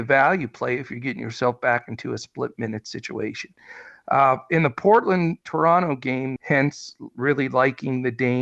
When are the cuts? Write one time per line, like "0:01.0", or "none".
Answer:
0:06.4